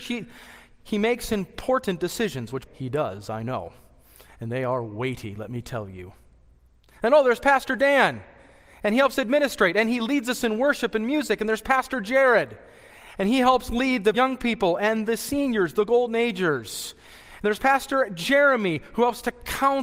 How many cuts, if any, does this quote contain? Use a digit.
2